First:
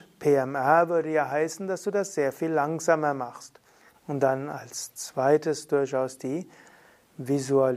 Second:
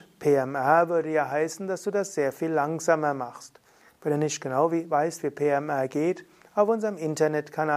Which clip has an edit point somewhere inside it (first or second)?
first